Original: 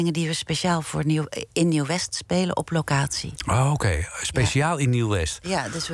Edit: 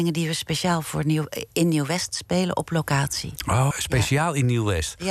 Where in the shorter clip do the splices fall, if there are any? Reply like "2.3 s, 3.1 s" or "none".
3.7 s